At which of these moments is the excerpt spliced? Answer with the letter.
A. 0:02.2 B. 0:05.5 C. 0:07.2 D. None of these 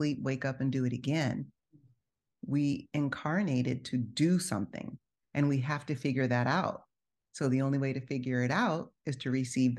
D